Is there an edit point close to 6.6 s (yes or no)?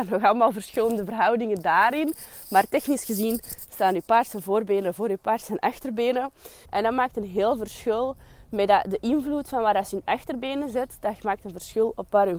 yes